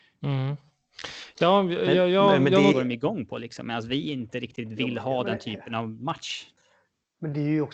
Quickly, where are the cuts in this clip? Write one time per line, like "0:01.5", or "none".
0:02.7